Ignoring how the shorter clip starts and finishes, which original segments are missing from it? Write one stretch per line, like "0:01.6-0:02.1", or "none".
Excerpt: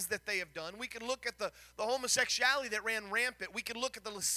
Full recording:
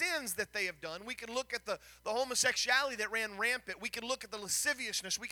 none